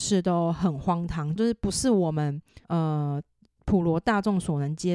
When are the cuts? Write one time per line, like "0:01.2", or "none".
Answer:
0:01.4
0:02.6